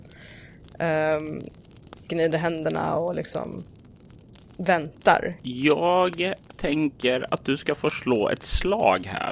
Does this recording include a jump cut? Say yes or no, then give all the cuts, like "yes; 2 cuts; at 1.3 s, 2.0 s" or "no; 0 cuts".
yes; 2 cuts; at 2.0 s, 5.4 s